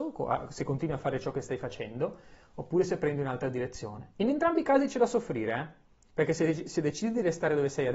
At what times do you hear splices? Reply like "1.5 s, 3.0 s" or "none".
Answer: none